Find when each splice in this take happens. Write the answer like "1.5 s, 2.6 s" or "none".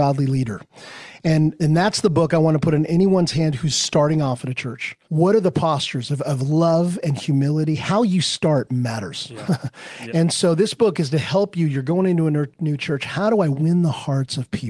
5.0 s, 10.1 s